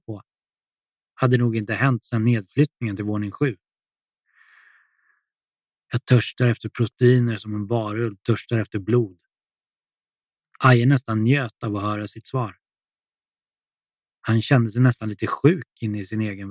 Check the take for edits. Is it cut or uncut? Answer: uncut